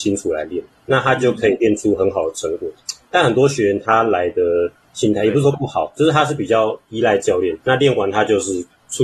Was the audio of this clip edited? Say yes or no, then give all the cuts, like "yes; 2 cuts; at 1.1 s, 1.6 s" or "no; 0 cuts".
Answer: no; 0 cuts